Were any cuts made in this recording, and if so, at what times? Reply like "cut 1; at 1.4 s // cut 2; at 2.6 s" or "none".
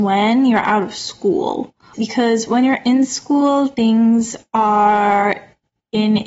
cut 1; at 1.9 s